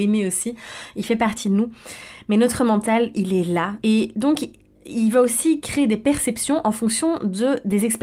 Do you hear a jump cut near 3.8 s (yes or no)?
yes